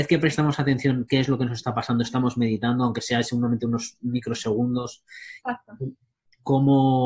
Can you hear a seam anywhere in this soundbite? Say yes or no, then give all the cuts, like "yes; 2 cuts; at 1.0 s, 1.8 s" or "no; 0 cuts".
no; 0 cuts